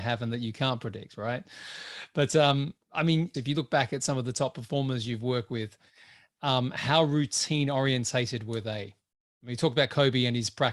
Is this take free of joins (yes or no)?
no